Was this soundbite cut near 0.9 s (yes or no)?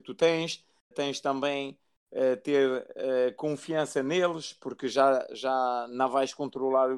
yes